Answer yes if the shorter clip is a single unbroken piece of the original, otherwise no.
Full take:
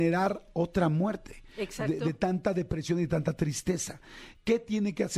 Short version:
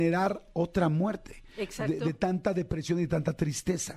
yes